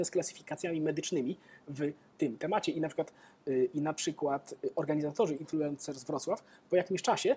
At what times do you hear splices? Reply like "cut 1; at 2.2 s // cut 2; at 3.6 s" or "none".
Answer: cut 1; at 5.3 s

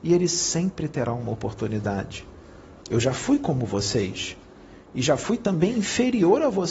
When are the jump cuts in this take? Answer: cut 1; at 2.8 s

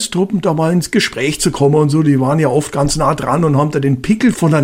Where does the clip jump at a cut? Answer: none

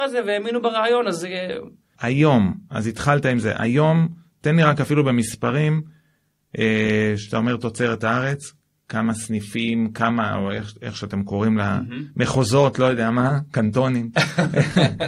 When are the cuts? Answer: cut 1; at 2.0 s

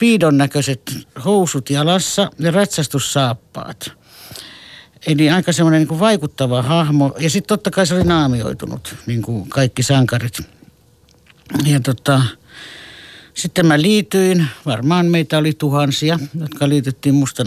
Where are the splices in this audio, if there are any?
none

